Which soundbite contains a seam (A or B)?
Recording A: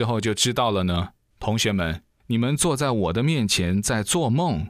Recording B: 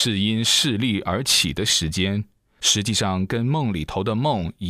A